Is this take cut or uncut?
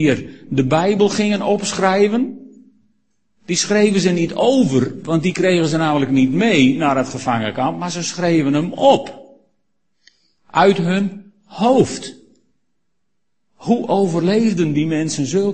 uncut